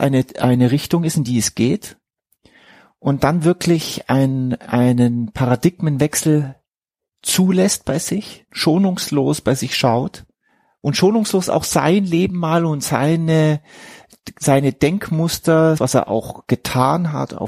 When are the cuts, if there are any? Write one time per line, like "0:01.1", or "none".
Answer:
0:08.5
0:15.8